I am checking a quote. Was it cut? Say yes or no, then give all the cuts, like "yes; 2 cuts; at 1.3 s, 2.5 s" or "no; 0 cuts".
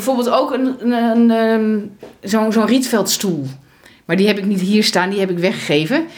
no; 0 cuts